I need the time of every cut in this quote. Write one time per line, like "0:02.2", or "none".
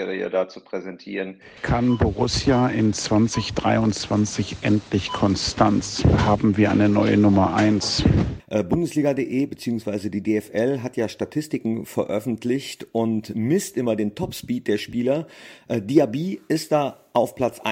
0:08.4